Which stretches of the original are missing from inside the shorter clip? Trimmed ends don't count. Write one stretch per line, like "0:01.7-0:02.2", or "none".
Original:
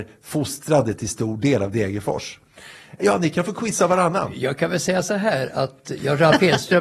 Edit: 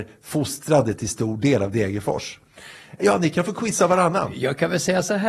none